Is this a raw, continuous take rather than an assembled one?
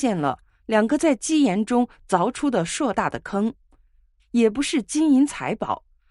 no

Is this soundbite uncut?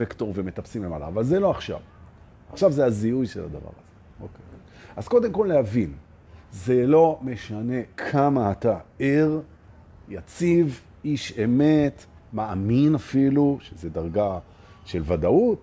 yes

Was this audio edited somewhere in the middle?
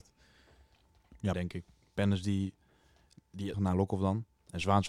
yes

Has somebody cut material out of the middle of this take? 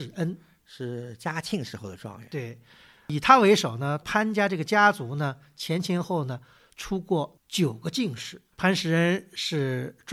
yes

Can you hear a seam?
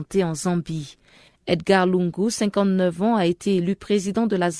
yes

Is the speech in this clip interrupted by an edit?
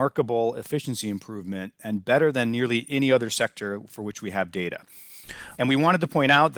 yes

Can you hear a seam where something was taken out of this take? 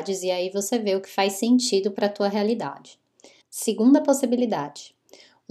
yes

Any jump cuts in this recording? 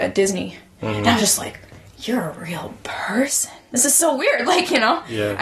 no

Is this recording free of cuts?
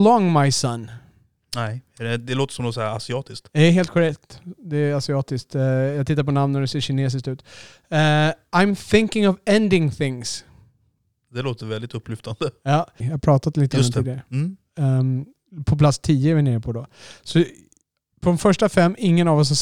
no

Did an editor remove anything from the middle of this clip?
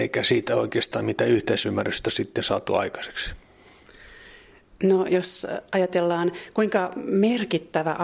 no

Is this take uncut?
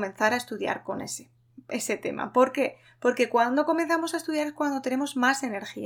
yes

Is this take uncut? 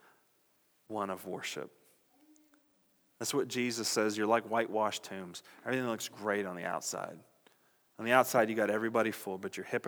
yes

